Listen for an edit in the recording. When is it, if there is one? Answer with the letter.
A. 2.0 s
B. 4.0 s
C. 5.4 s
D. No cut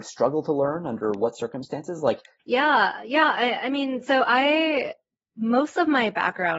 D